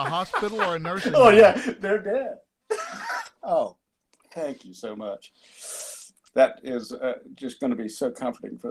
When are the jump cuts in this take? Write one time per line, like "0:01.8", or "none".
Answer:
none